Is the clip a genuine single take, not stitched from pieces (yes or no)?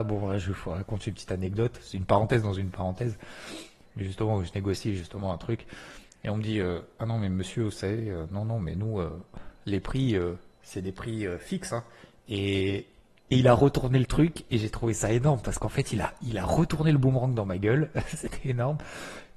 yes